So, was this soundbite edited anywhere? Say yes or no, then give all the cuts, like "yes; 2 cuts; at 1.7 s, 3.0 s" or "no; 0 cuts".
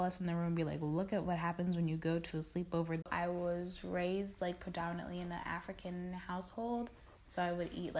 yes; 1 cut; at 3.0 s